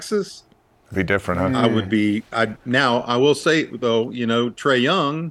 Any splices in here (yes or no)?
no